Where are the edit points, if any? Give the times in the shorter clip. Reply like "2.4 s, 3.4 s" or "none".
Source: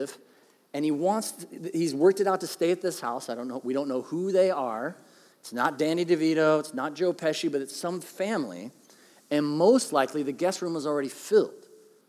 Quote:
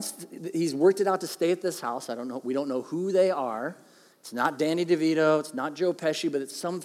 none

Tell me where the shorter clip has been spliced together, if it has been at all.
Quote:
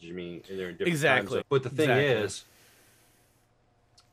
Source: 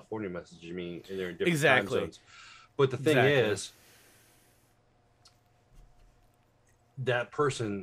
1.4 s

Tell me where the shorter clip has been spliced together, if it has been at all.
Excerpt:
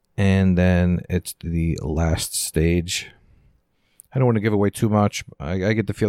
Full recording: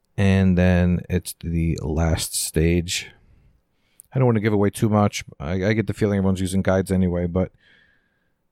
none

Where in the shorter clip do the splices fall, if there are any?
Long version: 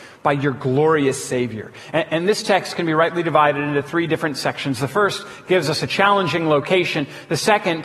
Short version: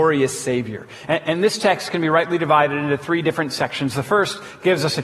none

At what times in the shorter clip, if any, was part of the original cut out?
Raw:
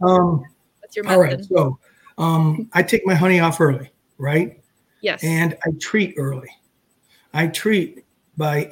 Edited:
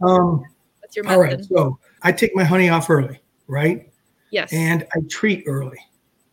2.0 s

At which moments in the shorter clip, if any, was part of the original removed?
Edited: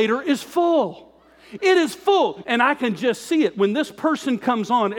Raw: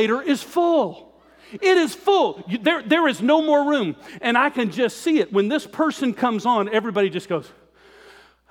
2.4 s

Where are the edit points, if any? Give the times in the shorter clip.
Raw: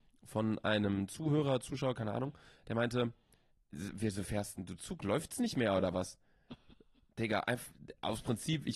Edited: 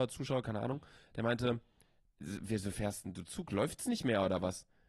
none

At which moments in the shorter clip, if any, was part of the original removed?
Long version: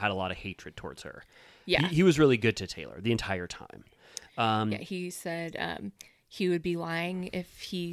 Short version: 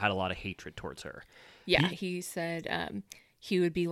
1.9 s

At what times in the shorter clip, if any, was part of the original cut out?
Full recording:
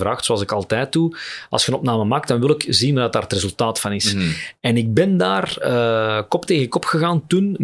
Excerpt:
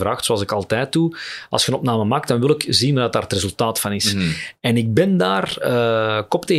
none

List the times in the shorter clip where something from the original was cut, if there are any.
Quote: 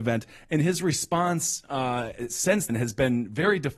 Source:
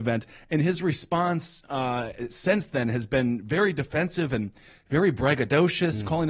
2.7 s

